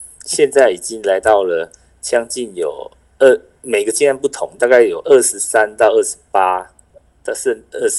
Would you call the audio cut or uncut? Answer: uncut